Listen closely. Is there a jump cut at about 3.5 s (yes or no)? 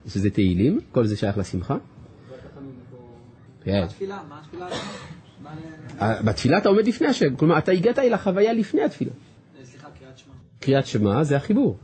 yes